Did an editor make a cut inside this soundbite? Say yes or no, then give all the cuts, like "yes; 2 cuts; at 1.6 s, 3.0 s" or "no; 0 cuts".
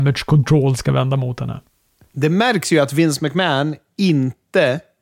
no; 0 cuts